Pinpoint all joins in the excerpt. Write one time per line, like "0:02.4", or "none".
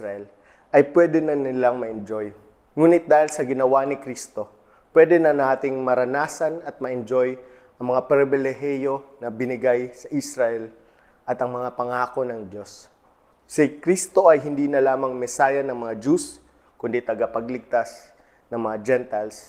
0:02.7
0:13.3